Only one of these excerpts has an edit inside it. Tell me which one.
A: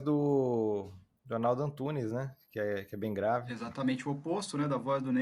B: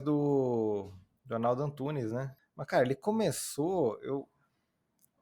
B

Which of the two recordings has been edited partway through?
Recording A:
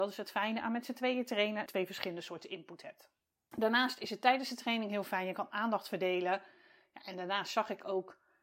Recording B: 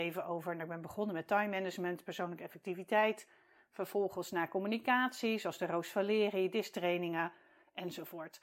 A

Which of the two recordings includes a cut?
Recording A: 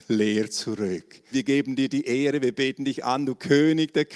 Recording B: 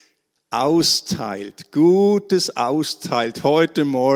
A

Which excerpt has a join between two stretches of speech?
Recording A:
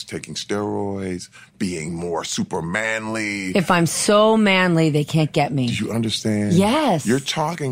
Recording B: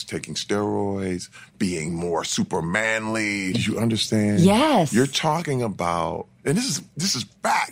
B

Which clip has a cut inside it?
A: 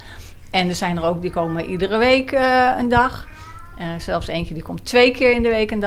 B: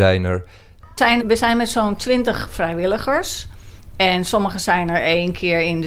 B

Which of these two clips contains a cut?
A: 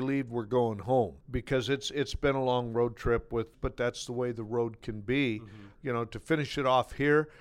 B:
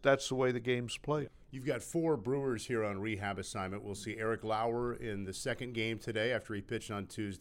A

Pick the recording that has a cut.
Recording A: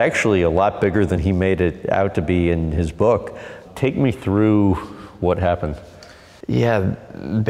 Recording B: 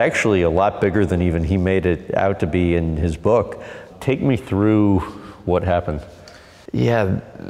A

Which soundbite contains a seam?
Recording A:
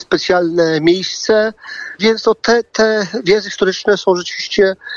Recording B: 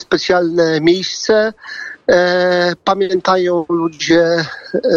A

